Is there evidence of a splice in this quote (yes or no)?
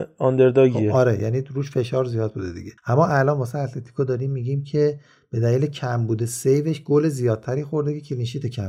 yes